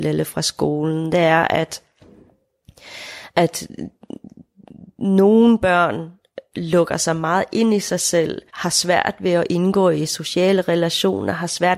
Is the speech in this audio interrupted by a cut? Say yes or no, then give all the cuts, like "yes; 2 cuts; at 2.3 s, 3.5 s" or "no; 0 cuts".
yes; 1 cut; at 8.5 s